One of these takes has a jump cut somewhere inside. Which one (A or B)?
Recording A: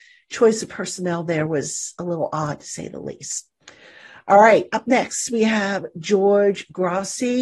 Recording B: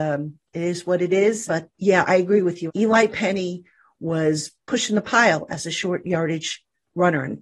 B